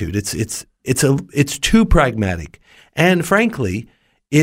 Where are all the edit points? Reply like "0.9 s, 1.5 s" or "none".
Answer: 2.8 s

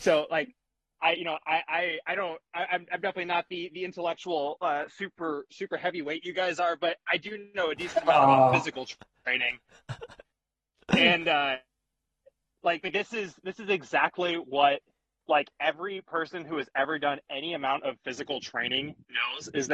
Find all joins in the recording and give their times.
none

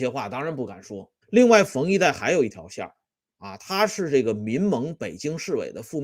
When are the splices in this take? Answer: 1.2 s

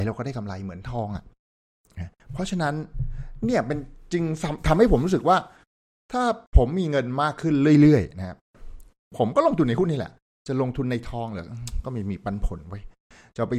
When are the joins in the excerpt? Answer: 6.5 s

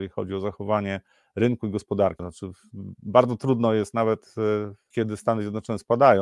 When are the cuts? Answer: 2.2 s, 4.9 s

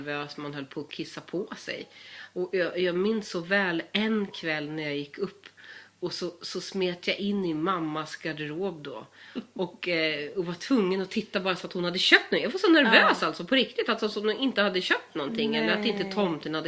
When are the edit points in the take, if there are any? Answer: none

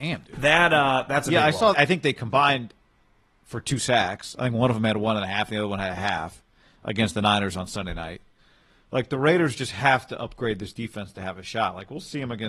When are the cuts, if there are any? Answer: 1.7 s

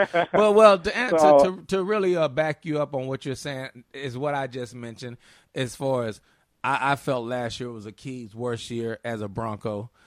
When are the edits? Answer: none

